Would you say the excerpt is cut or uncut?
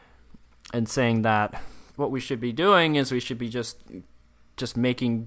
cut